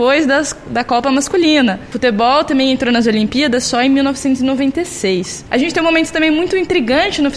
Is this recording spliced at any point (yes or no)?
yes